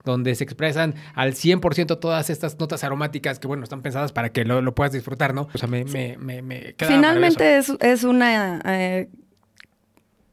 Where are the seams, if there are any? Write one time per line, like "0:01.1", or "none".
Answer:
0:05.5